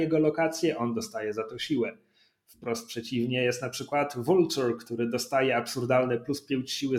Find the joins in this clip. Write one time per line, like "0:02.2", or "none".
none